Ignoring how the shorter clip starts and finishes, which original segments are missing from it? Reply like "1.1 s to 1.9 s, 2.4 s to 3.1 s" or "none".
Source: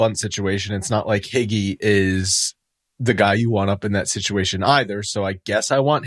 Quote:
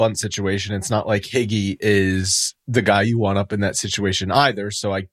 2.6 s to 2.9 s